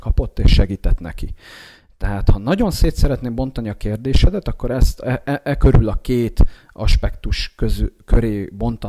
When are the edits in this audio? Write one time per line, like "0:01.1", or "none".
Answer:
none